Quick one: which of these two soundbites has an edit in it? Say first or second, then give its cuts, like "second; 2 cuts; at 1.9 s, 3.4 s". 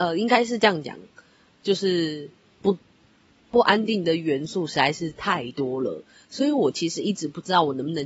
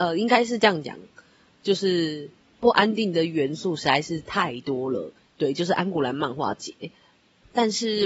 second; 2 cuts; at 2.4 s, 5.2 s